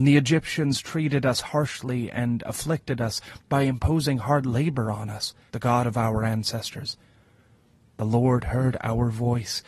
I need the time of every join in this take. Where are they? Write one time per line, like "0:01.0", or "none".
0:05.5